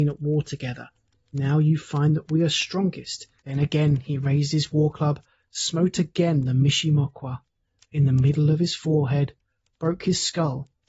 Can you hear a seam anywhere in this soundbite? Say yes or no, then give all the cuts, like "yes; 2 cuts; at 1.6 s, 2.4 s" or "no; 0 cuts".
yes; 1 cut; at 3.4 s